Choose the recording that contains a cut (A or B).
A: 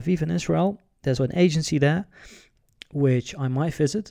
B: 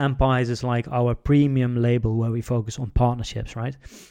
A